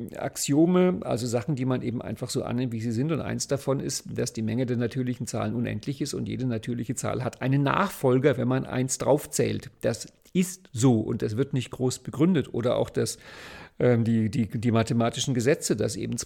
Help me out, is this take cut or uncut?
uncut